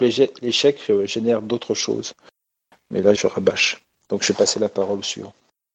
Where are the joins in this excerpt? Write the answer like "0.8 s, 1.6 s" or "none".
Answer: 3.2 s